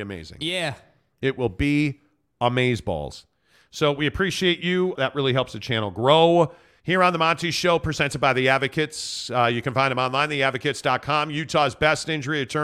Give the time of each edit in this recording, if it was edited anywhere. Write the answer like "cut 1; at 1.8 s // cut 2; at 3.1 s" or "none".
cut 1; at 5.0 s // cut 2; at 6.8 s